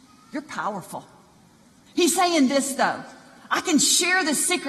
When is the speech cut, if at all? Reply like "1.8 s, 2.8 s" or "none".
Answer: 1.9 s